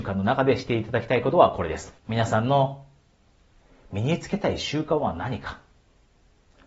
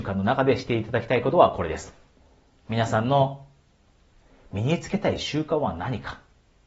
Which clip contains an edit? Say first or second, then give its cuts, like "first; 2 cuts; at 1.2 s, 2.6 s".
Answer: first; 1 cut; at 2.0 s